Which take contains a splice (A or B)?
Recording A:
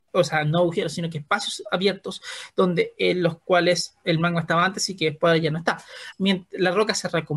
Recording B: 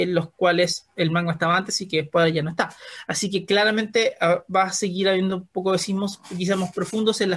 A